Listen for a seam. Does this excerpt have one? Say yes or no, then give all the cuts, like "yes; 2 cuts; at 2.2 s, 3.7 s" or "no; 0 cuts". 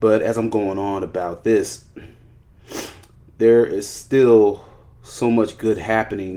no; 0 cuts